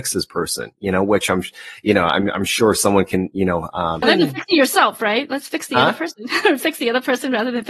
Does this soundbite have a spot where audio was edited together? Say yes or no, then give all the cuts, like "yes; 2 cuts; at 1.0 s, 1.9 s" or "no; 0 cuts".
yes; 1 cut; at 4.0 s